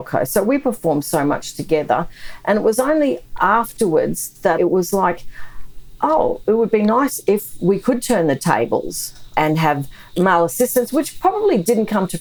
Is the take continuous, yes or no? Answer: yes